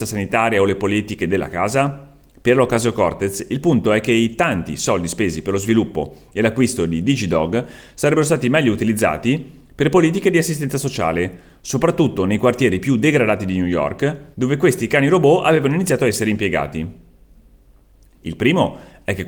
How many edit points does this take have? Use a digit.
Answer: 2